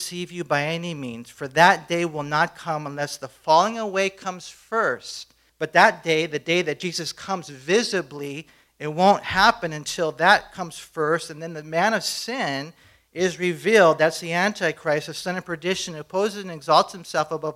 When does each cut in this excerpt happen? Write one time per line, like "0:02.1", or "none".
0:05.5